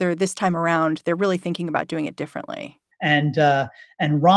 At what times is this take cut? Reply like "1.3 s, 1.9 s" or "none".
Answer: 2.9 s